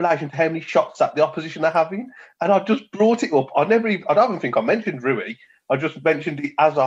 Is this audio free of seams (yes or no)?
yes